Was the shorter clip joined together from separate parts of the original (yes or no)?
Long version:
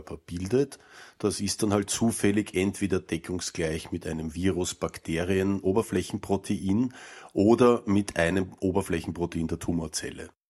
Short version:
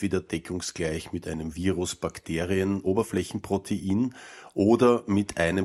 no